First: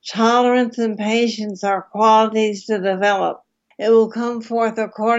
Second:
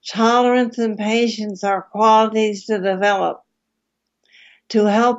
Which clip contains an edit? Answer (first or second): first